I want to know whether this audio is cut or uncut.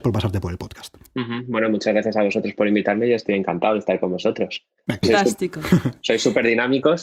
cut